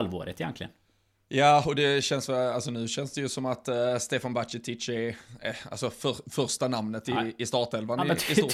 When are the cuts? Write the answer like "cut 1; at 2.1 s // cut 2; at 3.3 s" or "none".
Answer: none